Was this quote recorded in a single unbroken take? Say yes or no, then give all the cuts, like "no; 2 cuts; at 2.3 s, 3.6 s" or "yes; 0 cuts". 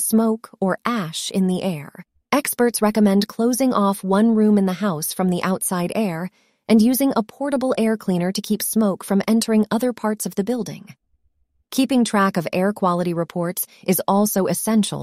no; 1 cut; at 2.2 s